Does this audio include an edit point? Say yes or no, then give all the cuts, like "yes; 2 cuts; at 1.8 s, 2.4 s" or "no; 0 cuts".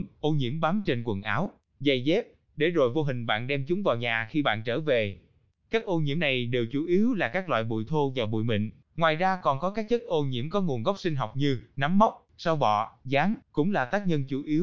yes; 3 cuts; at 8.8 s, 12.3 s, 13.4 s